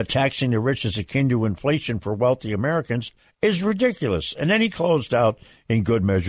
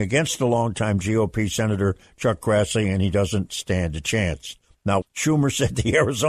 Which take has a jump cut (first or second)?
second